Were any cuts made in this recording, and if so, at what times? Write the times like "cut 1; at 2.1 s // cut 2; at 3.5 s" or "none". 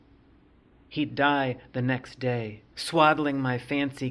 cut 1; at 2.7 s